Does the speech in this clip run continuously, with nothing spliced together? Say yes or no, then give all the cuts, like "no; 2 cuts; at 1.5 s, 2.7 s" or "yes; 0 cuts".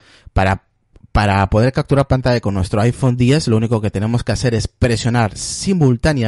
yes; 0 cuts